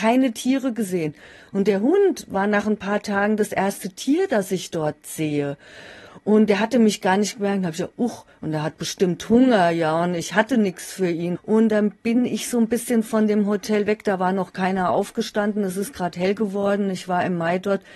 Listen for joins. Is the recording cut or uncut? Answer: cut